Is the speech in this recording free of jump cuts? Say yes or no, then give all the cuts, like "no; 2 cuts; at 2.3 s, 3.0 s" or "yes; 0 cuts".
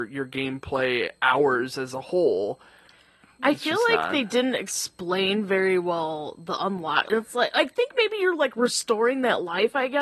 no; 1 cut; at 7.1 s